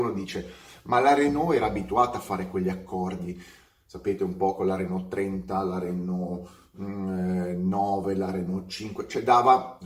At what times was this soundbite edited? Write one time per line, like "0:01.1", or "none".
none